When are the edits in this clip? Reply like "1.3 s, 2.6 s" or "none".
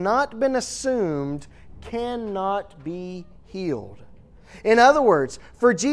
none

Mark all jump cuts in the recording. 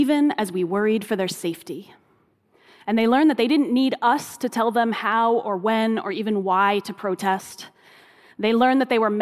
none

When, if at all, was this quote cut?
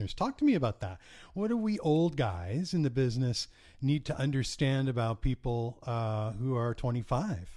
none

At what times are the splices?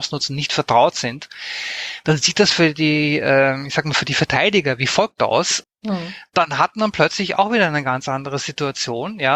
5.6 s

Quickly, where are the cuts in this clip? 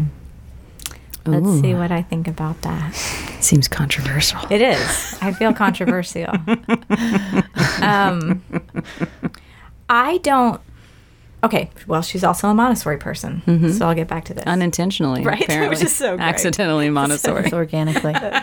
none

